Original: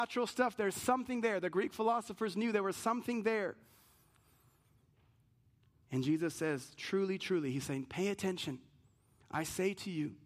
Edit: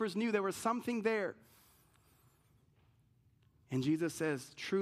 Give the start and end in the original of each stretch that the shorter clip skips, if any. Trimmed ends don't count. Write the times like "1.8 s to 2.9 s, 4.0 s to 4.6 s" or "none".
none